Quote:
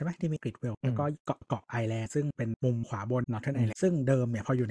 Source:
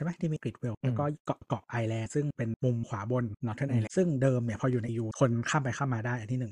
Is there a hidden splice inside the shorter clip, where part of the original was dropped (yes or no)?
yes